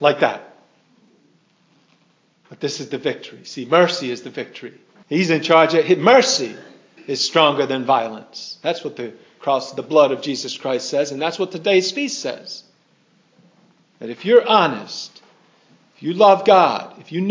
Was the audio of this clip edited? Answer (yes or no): yes